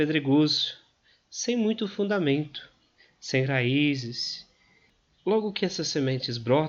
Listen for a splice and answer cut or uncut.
uncut